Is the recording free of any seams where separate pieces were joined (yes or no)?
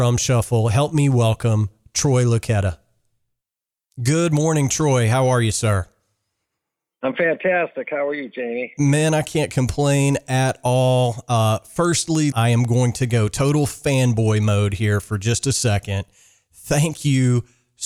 no